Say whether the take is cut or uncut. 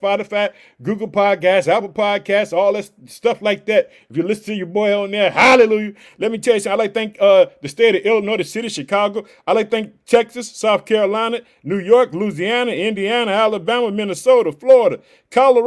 uncut